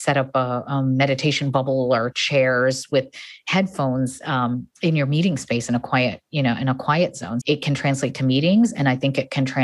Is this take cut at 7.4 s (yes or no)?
yes